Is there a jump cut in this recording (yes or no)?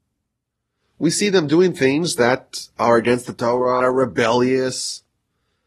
yes